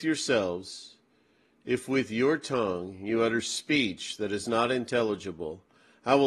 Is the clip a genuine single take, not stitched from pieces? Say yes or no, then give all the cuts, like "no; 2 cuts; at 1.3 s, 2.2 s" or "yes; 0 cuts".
yes; 0 cuts